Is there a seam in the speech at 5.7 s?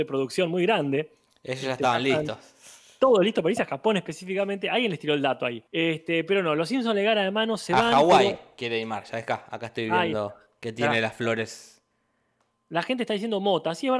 yes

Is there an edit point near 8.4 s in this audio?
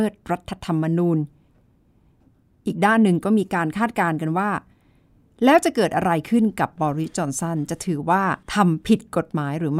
yes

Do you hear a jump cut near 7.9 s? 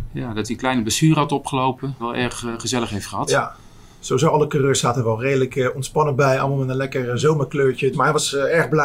yes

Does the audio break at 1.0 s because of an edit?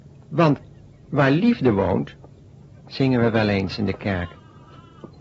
no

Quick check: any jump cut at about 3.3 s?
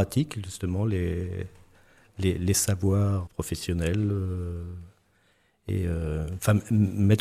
yes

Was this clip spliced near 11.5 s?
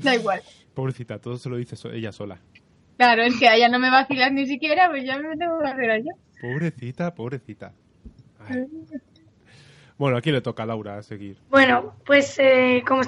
yes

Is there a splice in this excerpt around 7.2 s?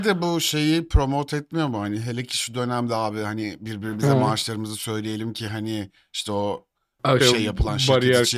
yes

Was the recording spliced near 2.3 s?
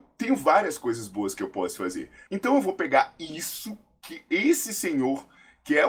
yes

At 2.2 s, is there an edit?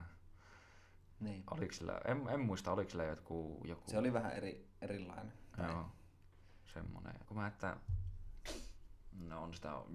no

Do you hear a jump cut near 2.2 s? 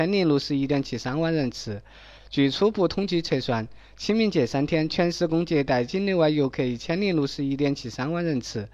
yes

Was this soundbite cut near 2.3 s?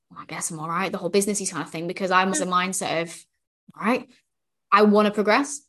yes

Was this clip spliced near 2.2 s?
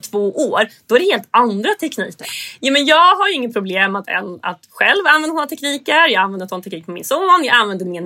yes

